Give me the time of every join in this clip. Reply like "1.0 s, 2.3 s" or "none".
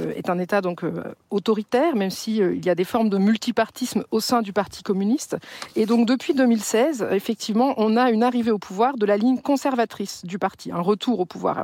none

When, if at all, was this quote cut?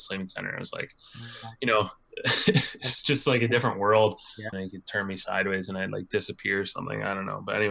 4.5 s

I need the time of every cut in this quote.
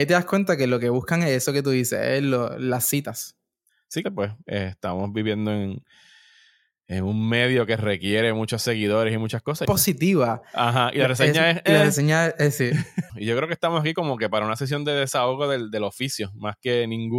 4.0 s, 9.7 s, 13.1 s

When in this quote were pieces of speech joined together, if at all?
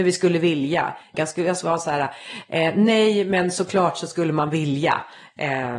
1.1 s

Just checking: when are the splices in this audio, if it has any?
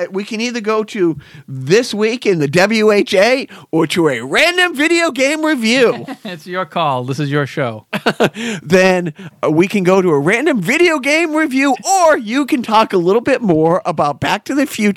none

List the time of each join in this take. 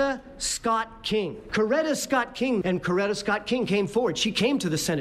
1.5 s, 2.6 s

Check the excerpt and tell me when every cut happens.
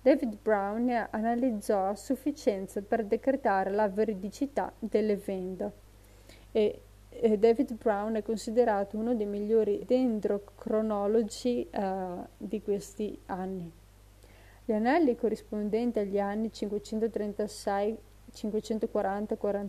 9.8 s

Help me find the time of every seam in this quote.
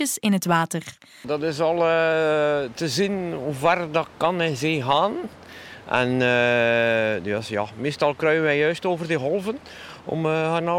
1.2 s

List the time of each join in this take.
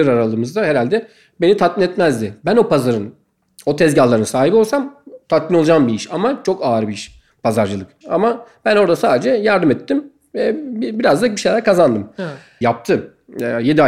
8.0 s, 12.6 s

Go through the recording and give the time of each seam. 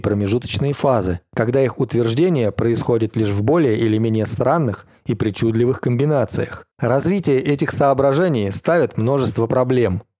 6.7 s

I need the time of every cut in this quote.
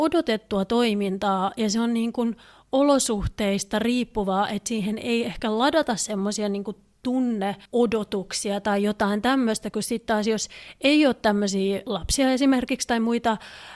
7.6 s

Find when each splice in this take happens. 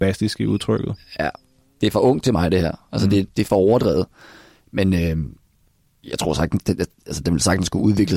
3.3 s

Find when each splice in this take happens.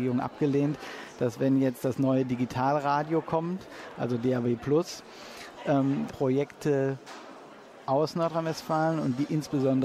6.1 s

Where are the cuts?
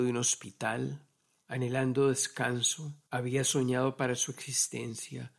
1.3 s, 3.1 s

